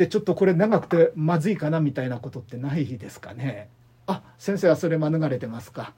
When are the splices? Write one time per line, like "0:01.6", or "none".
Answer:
0:04.0